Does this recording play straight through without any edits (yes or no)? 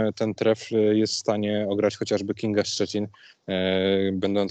yes